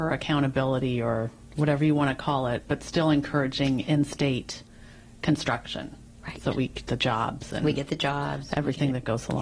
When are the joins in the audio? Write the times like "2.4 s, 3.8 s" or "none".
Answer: none